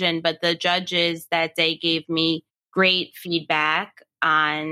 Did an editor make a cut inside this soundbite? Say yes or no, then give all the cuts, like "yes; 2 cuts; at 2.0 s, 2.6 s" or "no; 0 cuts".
no; 0 cuts